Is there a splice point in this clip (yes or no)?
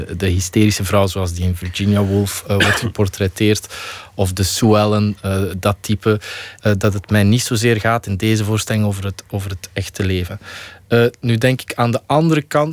yes